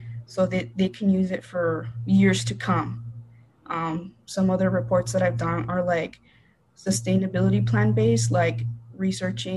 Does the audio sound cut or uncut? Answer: uncut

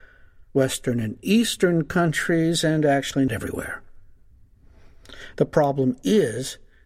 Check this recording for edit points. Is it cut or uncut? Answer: cut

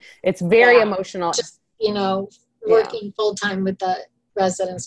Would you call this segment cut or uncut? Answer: cut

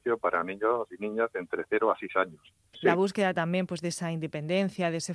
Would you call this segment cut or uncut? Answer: cut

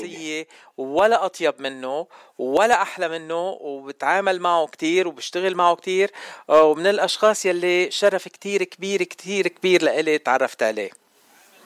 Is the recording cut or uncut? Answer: uncut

